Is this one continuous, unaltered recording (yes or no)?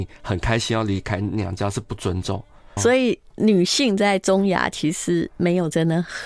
no